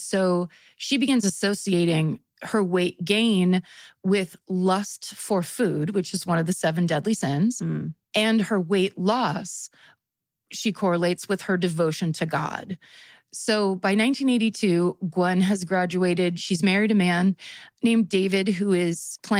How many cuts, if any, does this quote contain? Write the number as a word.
zero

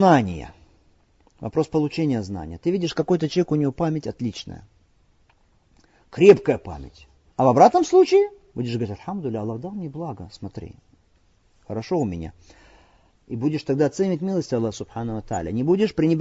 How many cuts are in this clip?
two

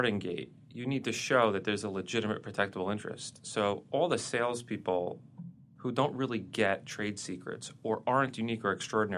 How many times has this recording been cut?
one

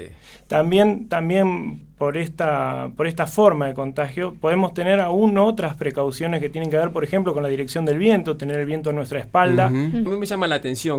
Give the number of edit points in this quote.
two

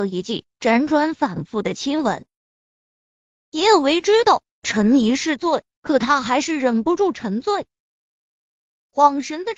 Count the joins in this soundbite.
zero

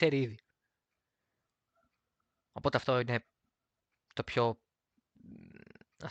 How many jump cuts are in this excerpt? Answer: zero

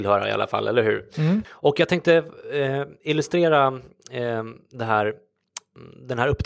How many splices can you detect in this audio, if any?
one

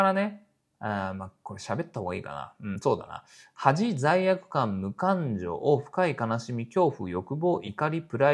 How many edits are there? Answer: zero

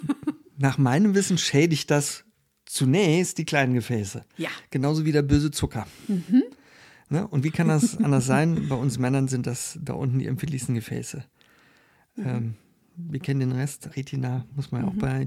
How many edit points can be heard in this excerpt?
one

